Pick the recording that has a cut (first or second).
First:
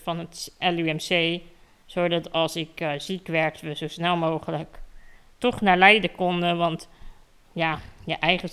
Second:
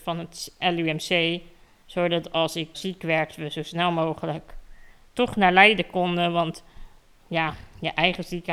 second